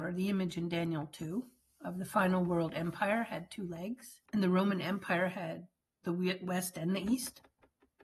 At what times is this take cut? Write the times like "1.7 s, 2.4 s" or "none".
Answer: 4.3 s